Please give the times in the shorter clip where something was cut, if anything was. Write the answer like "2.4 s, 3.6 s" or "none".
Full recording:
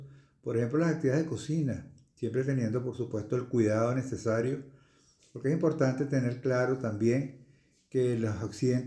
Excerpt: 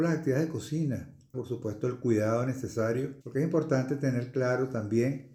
1.3 s, 3.2 s